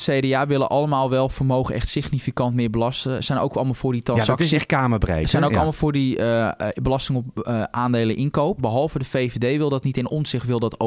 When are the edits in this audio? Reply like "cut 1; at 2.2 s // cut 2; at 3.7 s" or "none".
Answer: cut 1; at 8.6 s